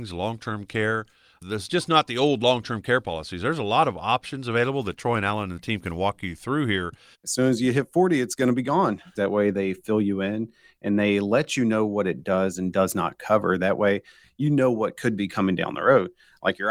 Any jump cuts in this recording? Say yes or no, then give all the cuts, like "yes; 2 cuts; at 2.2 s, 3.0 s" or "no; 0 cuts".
yes; 2 cuts; at 7.1 s, 9.2 s